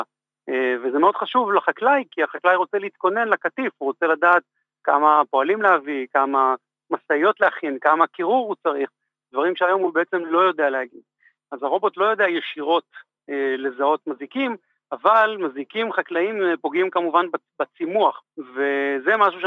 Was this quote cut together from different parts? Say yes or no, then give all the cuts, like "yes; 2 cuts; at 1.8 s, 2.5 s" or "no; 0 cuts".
yes; 2 cuts; at 11.4 s, 18.2 s